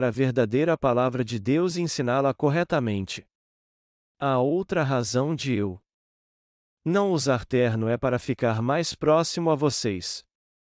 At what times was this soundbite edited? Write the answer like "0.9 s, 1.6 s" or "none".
none